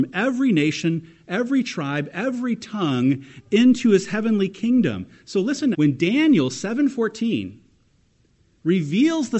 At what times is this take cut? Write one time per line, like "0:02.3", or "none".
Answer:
0:05.7